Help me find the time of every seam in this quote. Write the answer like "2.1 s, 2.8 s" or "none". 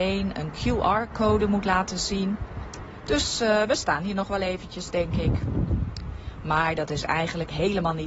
none

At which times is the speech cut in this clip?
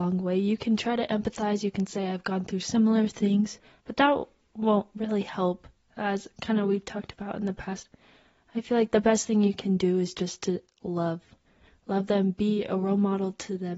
none

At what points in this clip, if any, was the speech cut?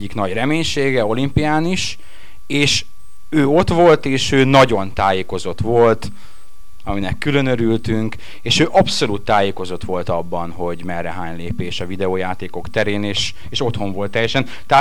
6.8 s

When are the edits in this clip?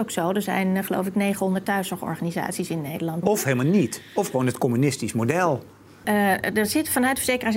3.2 s, 6.0 s

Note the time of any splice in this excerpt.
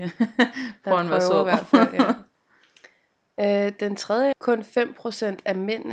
4.3 s

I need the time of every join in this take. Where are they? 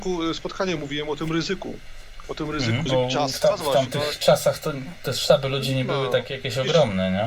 2.9 s

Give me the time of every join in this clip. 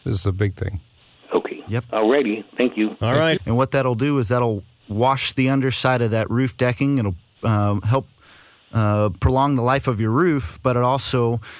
3.4 s

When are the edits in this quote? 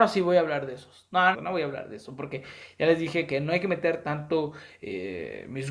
1.3 s

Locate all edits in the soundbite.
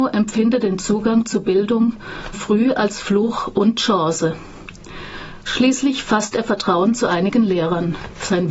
2.3 s

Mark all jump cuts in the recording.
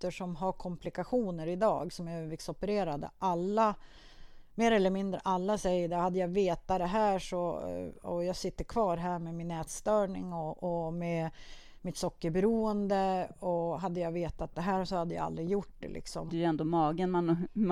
16.3 s

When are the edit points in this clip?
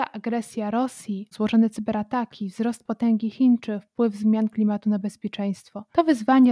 1.3 s

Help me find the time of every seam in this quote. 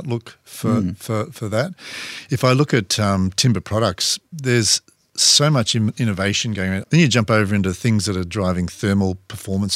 6.8 s

